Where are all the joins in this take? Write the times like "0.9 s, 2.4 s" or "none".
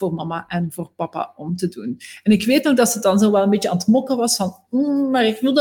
none